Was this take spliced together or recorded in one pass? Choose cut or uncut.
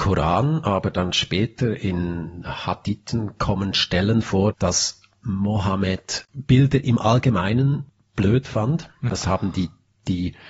cut